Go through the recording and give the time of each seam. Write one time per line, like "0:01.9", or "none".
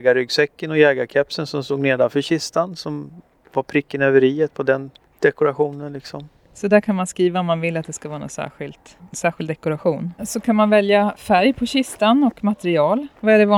0:10.2

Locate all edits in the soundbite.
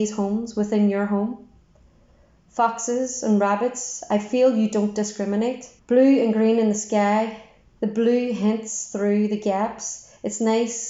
0:05.8

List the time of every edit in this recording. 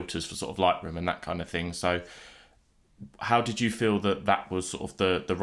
none

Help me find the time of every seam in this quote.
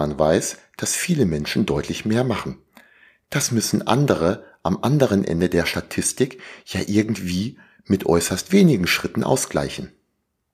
none

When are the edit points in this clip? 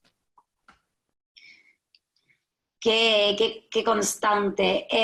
none

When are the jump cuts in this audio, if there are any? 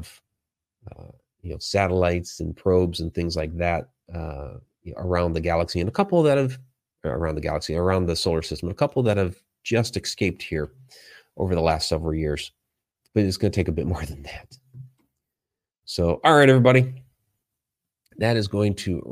0:13.1

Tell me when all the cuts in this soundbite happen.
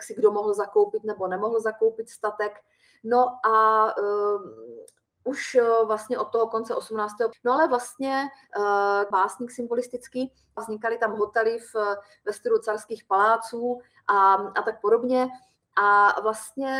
0:07.3
0:09.1
0:10.6

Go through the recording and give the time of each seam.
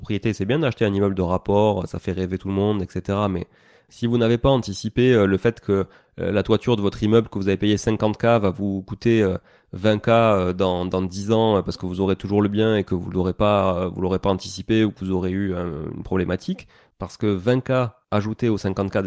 none

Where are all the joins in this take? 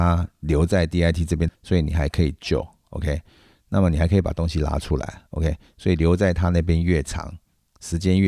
0:01.5

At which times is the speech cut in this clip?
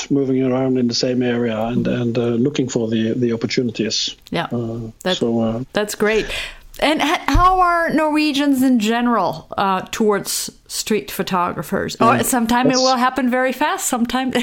0:05.0
0:12.0

